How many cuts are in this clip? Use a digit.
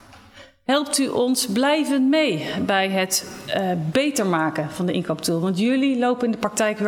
0